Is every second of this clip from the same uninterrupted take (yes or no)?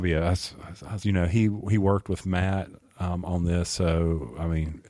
no